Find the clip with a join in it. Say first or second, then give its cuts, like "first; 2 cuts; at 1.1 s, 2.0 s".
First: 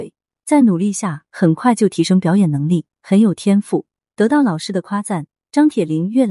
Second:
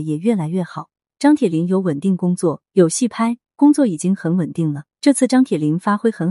second; 1 cut; at 5.0 s